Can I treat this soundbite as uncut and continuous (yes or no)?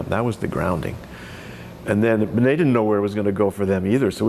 yes